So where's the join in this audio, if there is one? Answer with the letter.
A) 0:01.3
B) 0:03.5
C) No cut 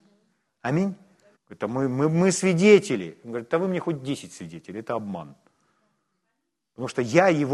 A